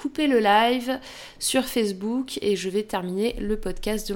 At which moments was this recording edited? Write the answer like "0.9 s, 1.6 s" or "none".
none